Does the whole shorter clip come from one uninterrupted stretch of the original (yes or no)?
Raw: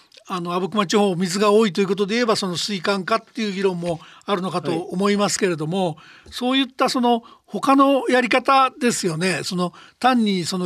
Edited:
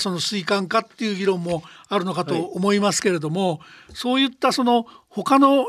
yes